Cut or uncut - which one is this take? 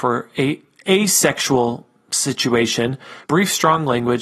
cut